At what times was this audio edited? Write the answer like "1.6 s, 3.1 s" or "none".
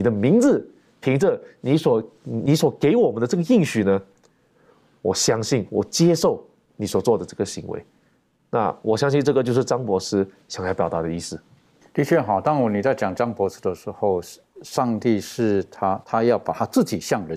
16.0 s